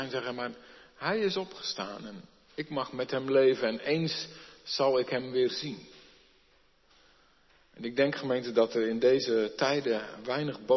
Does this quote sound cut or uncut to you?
uncut